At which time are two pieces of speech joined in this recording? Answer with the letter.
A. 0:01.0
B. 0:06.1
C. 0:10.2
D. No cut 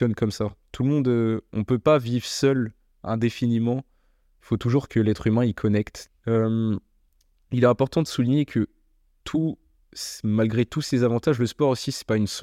B